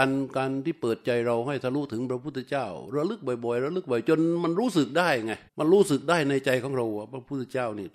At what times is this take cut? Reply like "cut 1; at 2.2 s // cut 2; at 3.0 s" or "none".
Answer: cut 1; at 5.5 s